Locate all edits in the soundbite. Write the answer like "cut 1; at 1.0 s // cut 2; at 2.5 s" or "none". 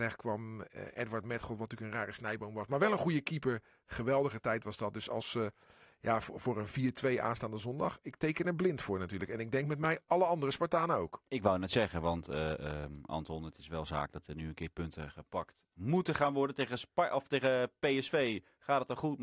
none